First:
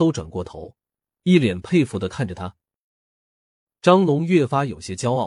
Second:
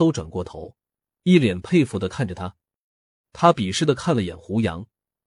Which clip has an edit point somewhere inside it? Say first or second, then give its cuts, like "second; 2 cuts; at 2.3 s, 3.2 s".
second; 1 cut; at 3.2 s